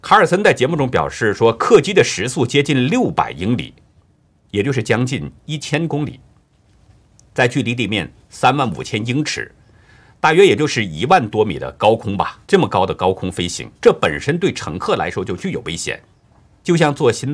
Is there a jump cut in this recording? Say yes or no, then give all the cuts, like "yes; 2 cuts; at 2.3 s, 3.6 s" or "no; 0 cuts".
yes; 2 cuts; at 12.4 s, 13.7 s